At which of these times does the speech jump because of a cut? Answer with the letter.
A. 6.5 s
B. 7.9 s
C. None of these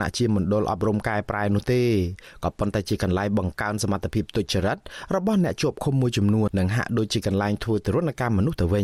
A